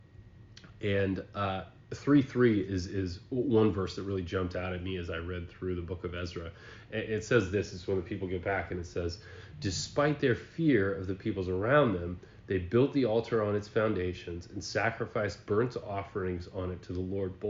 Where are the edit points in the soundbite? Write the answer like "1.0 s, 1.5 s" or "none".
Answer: none